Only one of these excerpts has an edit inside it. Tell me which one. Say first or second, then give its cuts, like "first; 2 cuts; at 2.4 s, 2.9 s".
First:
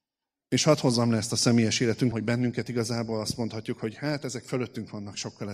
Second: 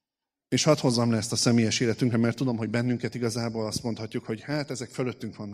first; 1 cut; at 2.1 s